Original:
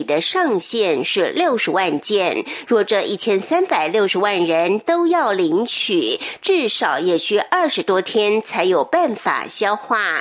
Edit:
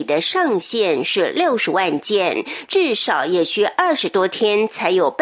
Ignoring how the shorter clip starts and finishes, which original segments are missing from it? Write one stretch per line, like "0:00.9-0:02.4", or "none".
0:02.6-0:06.4